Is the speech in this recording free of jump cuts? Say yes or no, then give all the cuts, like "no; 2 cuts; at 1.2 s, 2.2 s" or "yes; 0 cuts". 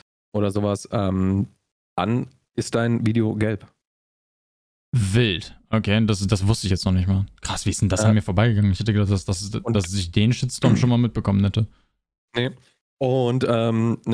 yes; 0 cuts